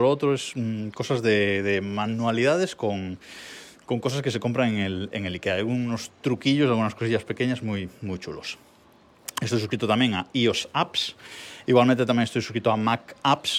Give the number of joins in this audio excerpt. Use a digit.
1